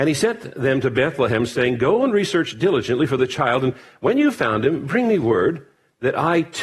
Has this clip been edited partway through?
no; 0 cuts

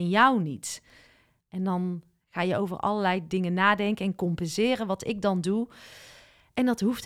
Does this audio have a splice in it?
yes; 1 cut; at 1.4 s

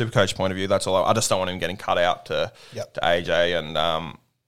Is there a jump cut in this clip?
no; 0 cuts

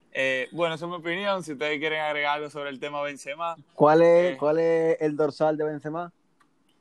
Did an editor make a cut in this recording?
no; 0 cuts

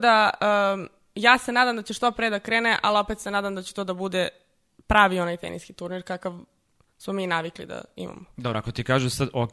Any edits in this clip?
no; 0 cuts

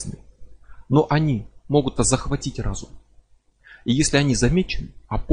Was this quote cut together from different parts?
yes; 1 cut; at 2.0 s

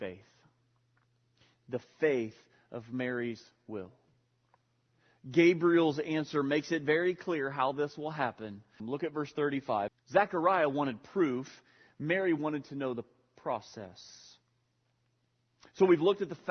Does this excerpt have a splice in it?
yes; 2 cuts; at 8.8 s, 9.9 s

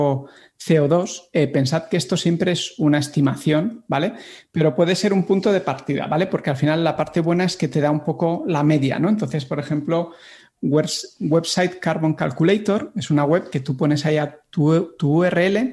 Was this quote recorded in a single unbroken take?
yes; 0 cuts

